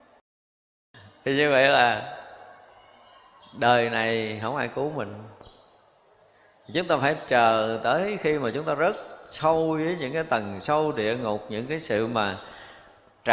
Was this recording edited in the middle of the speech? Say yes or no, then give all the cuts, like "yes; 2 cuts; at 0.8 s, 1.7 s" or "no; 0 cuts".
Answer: no; 0 cuts